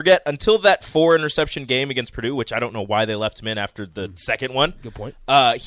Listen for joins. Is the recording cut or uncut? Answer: uncut